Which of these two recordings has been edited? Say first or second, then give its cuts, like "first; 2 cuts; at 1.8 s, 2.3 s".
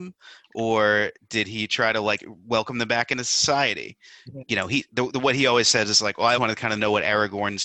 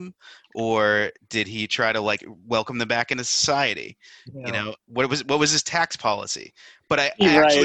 first; 2 cuts; at 4.4 s, 6.4 s